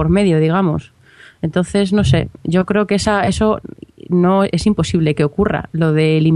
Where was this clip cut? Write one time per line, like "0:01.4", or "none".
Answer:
none